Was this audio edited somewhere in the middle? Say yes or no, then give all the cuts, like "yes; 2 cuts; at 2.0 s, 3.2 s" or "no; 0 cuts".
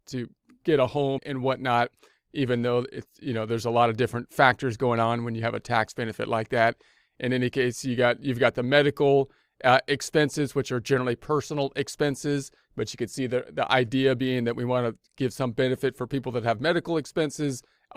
yes; 1 cut; at 1.2 s